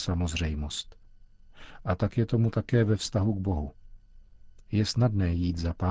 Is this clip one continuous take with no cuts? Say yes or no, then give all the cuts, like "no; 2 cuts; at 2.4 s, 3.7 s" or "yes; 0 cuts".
yes; 0 cuts